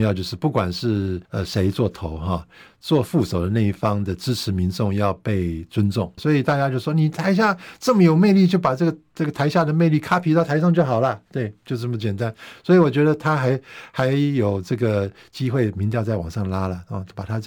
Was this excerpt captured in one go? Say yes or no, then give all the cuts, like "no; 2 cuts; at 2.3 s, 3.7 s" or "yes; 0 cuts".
no; 2 cuts; at 1.3 s, 6.2 s